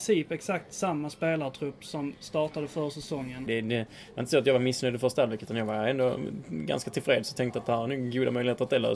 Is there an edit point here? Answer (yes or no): yes